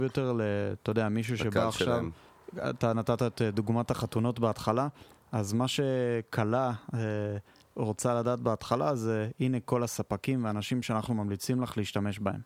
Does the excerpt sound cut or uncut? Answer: uncut